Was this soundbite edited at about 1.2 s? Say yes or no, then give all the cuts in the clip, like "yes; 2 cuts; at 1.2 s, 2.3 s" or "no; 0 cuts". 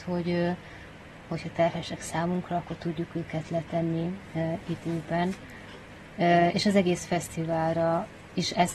yes; 1 cut; at 1.2 s